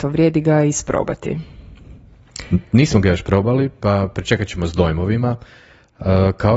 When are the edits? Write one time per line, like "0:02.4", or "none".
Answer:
none